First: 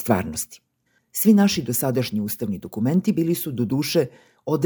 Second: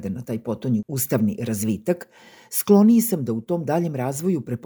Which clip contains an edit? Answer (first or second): first